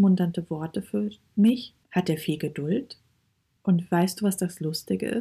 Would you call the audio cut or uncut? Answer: cut